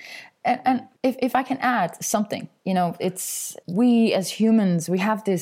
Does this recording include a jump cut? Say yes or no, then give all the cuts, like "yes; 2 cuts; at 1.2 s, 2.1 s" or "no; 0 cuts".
yes; 2 cuts; at 0.9 s, 3.6 s